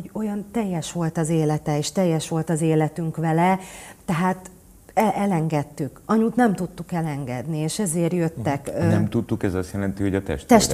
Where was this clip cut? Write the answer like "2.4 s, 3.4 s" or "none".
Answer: none

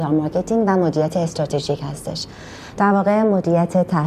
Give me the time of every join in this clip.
none

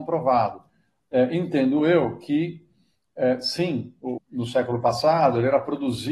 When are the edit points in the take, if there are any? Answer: 1.0 s, 4.2 s

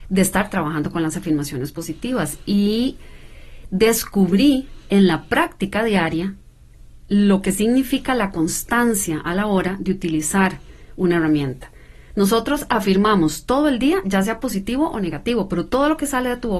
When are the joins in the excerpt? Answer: 12.1 s

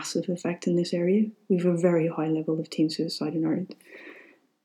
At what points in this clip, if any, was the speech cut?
none

